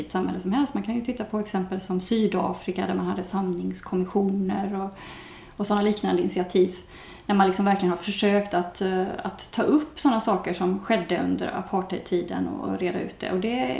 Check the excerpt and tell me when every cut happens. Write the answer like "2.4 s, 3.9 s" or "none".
none